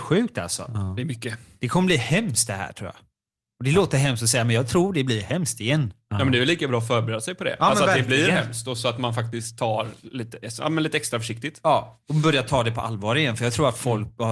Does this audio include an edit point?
no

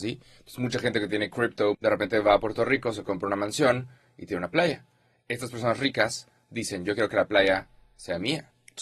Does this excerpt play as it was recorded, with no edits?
no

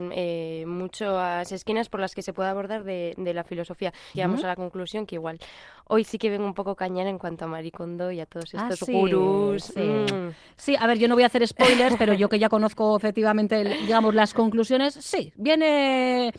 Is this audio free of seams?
no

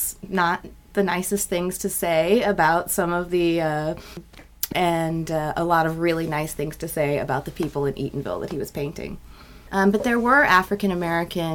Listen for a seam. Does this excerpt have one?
yes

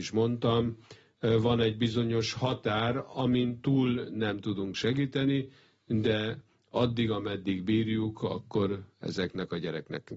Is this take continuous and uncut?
yes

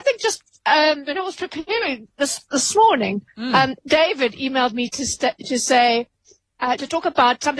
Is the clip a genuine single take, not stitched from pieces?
yes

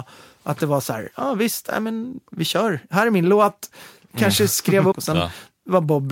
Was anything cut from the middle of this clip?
yes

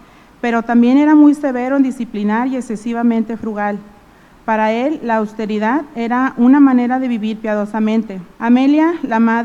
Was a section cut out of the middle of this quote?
yes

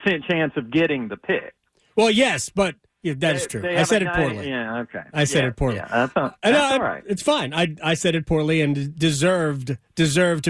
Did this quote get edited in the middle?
no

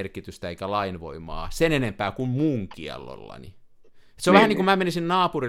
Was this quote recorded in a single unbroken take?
yes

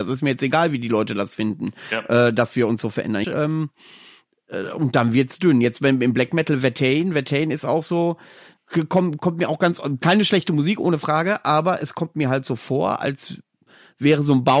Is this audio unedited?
no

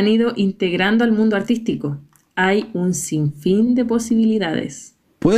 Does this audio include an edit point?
no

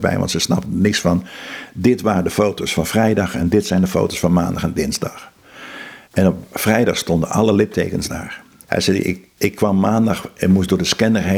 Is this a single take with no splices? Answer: no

